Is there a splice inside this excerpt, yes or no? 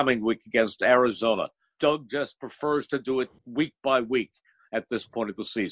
yes